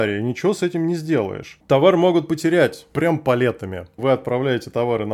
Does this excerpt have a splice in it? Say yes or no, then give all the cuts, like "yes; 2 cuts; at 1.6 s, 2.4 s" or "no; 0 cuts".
yes; 2 cuts; at 1.6 s, 4.0 s